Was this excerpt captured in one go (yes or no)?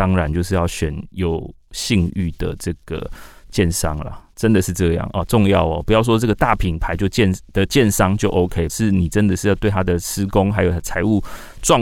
no